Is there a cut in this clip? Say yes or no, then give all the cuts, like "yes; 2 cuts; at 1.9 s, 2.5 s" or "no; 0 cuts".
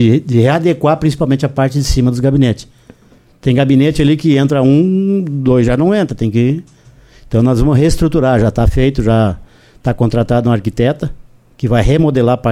no; 0 cuts